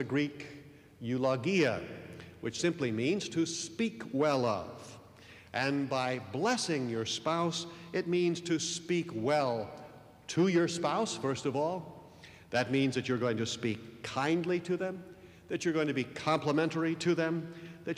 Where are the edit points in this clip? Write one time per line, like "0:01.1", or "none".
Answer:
none